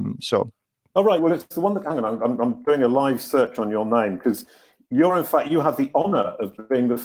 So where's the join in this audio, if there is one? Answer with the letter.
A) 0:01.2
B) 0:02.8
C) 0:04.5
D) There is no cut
A